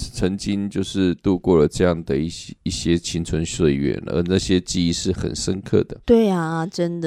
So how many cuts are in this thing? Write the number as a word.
one